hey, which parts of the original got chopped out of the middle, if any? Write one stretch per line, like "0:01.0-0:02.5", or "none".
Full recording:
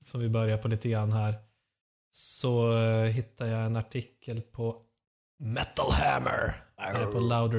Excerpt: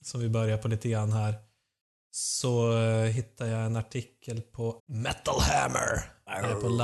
0:04.8-0:05.3

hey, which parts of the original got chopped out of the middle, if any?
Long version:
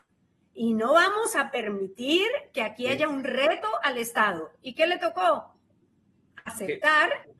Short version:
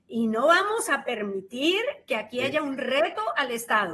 none

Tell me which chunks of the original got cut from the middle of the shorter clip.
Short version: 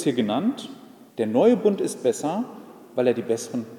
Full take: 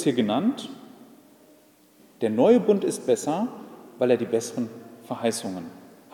0:01.1-0:02.1

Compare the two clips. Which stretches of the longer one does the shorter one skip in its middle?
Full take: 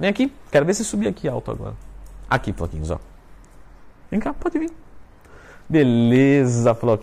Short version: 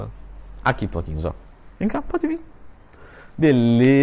0:03.4-0:04.1

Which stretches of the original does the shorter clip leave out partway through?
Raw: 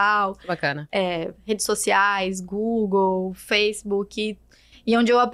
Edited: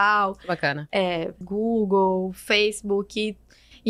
0:01.4-0:02.4

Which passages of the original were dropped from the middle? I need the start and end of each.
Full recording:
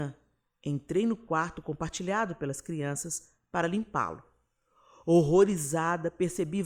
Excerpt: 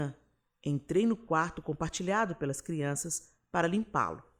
none

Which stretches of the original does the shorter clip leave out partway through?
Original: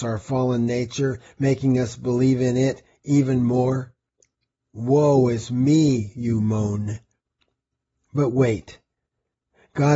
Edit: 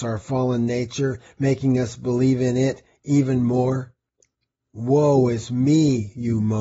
none

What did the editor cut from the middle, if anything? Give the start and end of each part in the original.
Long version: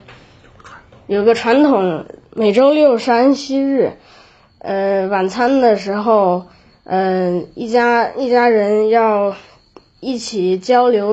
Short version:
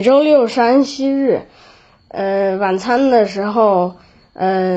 none

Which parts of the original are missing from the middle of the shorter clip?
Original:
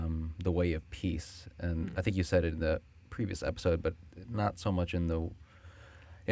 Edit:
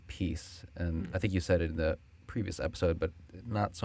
none

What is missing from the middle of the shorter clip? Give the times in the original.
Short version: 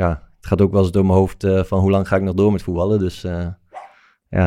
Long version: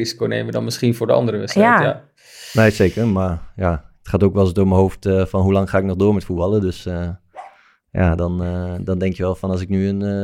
none

